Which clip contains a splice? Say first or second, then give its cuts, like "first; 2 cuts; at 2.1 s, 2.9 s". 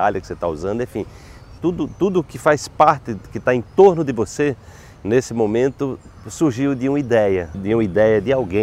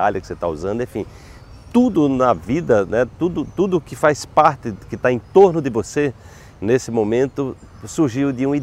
first; 2 cuts; at 1.6 s, 7.5 s